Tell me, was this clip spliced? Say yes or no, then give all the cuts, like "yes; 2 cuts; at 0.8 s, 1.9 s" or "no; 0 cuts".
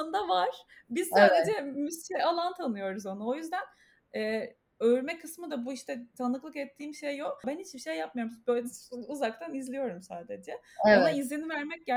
yes; 1 cut; at 7.4 s